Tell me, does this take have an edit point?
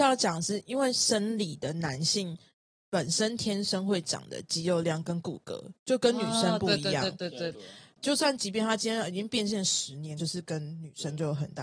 yes; 2 cuts; at 7.5 s, 10.2 s

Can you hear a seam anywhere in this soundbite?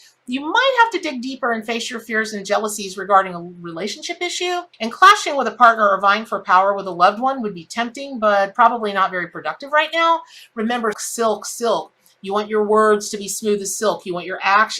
yes; 2 cuts; at 4.7 s, 10.9 s

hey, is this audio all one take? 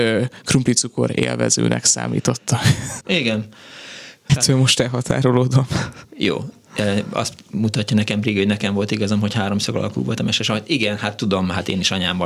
no; 2 cuts; at 3.0 s, 4.3 s

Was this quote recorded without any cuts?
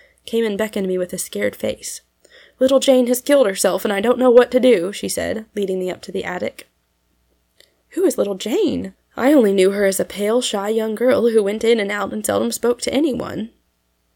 no; 1 cut; at 8.9 s

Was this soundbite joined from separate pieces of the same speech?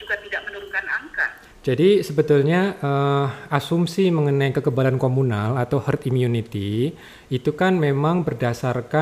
yes; 1 cut; at 1.5 s

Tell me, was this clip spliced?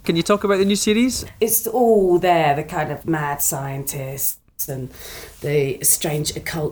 yes; 3 cuts; at 1.3 s, 3.0 s, 4.7 s

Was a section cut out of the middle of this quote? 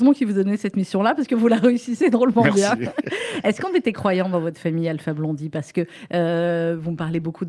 no; 0 cuts

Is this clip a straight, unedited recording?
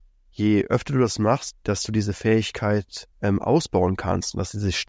no; 2 cuts; at 1.5 s, 3.1 s

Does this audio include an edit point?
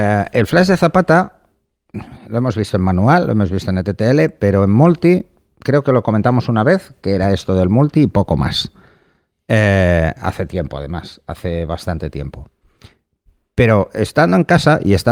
no; 0 cuts

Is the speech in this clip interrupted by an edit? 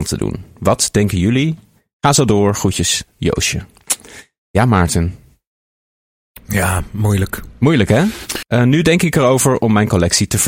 yes; 1 cut; at 8.4 s

